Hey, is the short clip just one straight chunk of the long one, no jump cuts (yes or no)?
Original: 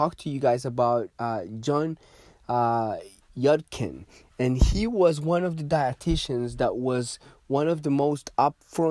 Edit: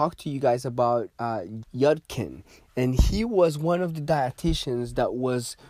no